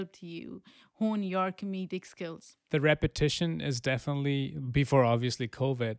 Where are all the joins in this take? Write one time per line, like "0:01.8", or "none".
none